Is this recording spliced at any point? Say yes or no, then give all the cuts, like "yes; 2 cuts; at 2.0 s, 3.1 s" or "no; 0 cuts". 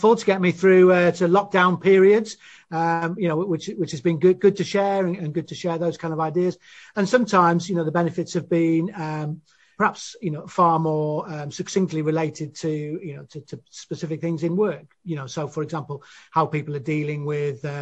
no; 0 cuts